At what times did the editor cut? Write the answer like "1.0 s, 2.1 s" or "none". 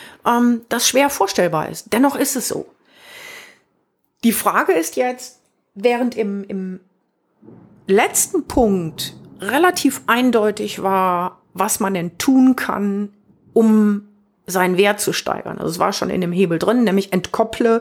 none